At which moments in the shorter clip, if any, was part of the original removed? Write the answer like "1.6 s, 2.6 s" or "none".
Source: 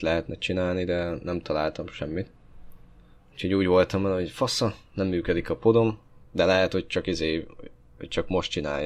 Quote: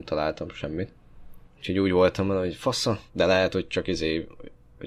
1.5 s, 3.1 s